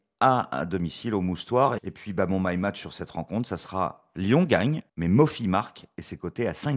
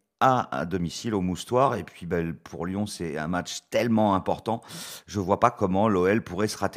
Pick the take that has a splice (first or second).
first